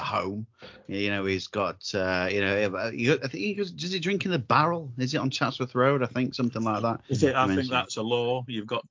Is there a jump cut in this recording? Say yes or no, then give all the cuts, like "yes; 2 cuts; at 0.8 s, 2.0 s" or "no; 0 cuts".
no; 0 cuts